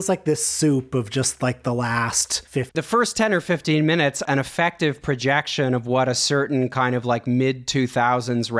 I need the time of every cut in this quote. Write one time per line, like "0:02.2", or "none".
0:02.7
0:04.2